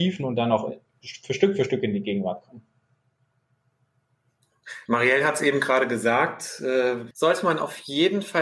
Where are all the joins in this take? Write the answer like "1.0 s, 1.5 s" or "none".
4.9 s, 7.1 s